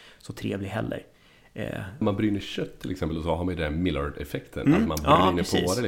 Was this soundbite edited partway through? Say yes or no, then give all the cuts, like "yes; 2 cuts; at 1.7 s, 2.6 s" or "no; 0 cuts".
yes; 1 cut; at 2.0 s